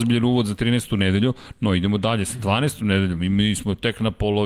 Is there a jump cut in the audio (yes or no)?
no